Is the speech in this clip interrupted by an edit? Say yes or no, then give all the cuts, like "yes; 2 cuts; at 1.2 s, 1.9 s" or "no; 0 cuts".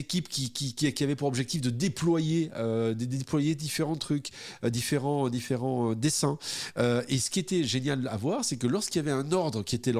no; 0 cuts